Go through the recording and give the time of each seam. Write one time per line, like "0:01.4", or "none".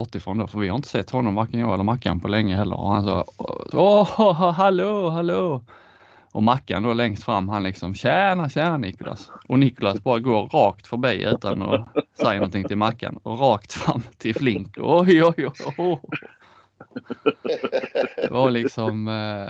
0:03.7